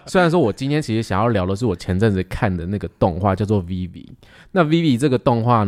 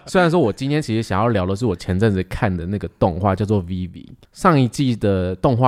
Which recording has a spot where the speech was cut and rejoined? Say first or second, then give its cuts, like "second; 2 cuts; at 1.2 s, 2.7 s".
second; 1 cut; at 4.2 s